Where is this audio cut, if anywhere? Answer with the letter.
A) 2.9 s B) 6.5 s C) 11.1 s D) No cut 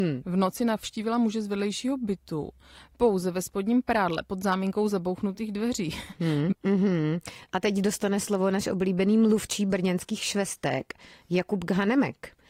B